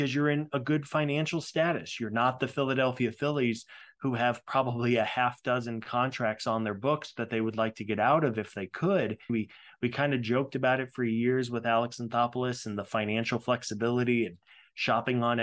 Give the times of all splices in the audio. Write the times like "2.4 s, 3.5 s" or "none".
9.3 s